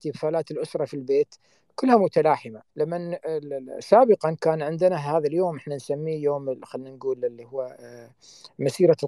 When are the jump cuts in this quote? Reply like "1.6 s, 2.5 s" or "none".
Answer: 2.7 s

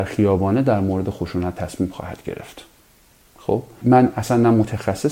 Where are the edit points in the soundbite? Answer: 3.8 s

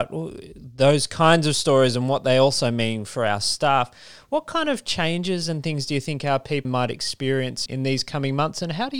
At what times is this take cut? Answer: 6.6 s, 7.7 s

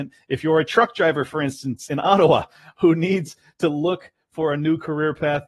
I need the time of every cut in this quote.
none

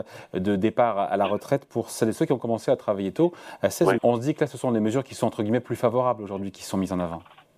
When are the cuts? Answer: 4.0 s

